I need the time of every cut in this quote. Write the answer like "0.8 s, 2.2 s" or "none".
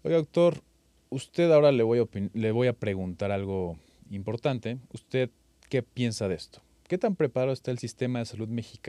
none

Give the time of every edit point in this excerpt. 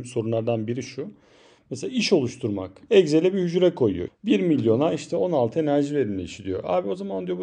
4.1 s

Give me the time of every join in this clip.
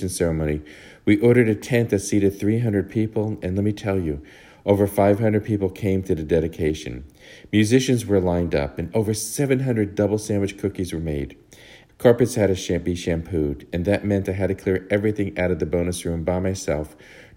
11.9 s

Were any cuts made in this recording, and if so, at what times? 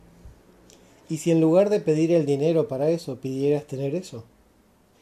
none

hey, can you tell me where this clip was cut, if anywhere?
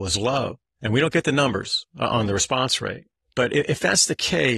none

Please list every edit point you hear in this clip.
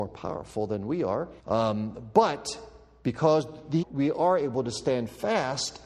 1.4 s, 3.8 s

